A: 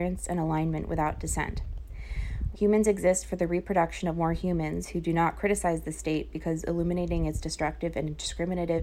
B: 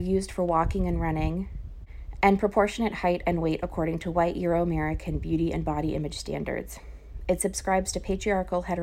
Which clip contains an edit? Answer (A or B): A